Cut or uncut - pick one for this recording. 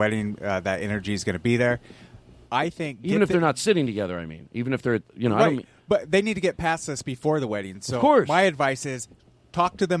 uncut